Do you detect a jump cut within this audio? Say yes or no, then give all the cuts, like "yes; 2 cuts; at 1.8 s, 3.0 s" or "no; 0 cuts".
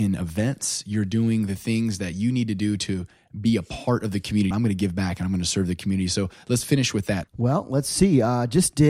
yes; 2 cuts; at 4.5 s, 7.2 s